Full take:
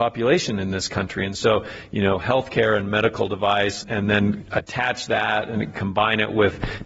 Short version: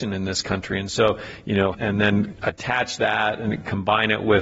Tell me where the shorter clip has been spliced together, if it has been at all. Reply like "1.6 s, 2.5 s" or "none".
1.7 s